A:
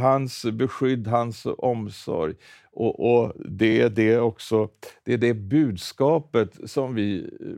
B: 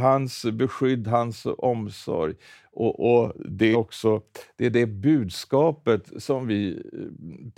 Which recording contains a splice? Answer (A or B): B